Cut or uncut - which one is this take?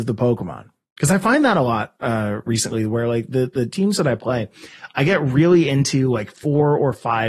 uncut